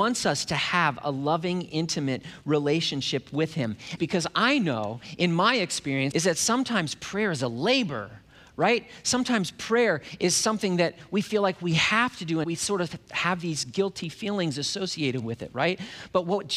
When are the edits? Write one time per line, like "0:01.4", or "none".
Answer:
0:04.0
0:06.1
0:12.4

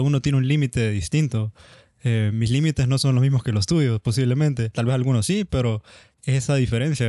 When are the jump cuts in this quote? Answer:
none

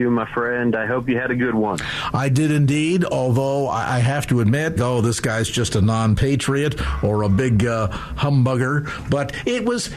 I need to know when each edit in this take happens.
0:04.8

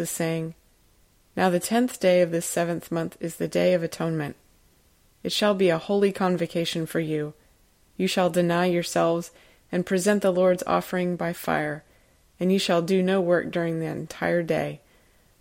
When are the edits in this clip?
none

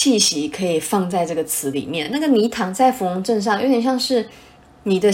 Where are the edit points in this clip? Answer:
none

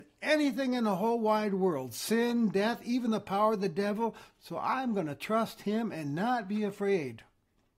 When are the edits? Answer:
none

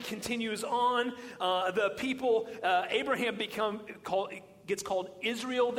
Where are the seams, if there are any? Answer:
none

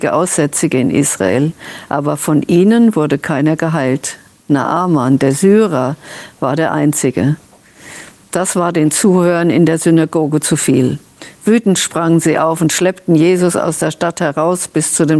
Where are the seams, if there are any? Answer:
none

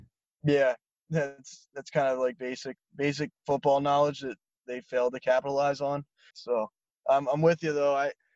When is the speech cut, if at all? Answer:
0:06.3

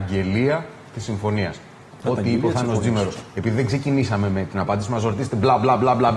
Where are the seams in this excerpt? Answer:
none

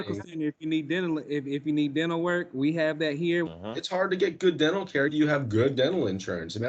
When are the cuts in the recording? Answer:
0:03.5
0:05.1

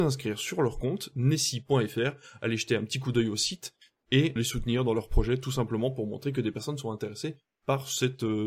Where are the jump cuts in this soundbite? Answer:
0:04.4

